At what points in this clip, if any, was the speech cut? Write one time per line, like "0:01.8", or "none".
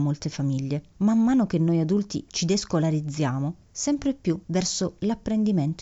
0:02.3
0:03.7